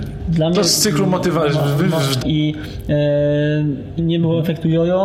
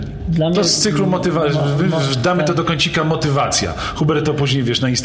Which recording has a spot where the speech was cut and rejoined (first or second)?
first